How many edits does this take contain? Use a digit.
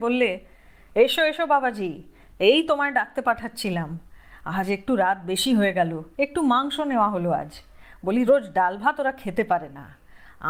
2